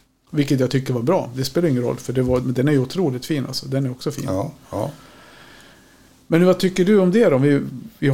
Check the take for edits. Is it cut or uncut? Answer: cut